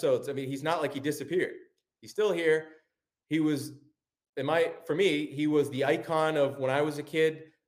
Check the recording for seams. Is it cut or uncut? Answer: uncut